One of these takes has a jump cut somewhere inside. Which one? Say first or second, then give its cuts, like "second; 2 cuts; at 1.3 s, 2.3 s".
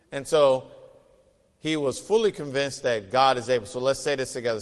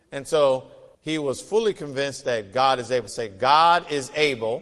second; 2 cuts; at 0.9 s, 3.1 s